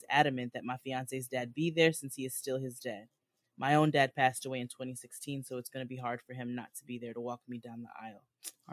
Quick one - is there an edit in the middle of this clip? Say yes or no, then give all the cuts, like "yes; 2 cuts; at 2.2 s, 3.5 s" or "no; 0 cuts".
no; 0 cuts